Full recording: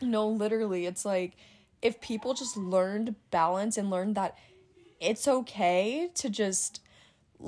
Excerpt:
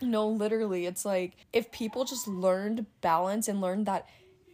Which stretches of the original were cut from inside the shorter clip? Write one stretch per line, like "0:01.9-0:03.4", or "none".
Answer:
0:01.4-0:01.7